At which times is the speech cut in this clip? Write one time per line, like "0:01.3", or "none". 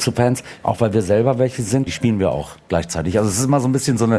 0:01.9